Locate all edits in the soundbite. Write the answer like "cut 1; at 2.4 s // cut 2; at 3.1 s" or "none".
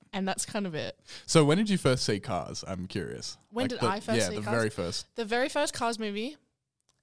none